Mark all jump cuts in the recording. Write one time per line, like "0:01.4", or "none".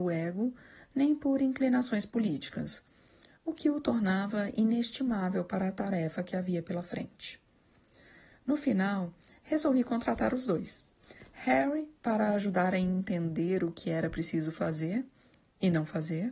none